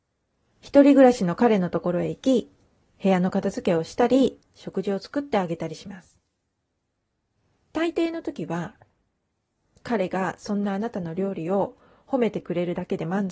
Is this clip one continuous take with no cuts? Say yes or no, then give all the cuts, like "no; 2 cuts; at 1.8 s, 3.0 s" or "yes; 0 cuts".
yes; 0 cuts